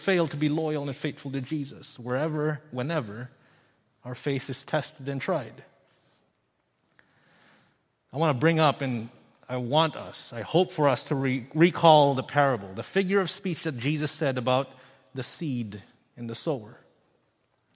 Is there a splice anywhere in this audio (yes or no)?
no